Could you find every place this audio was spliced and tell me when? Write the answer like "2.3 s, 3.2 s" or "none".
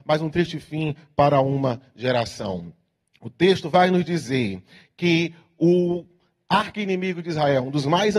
none